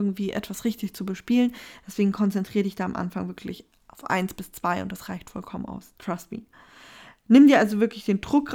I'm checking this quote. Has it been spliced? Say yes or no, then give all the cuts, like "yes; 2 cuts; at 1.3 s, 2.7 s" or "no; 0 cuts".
no; 0 cuts